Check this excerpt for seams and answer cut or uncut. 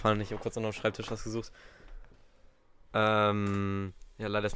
uncut